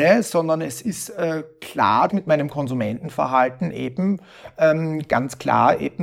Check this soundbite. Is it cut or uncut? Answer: cut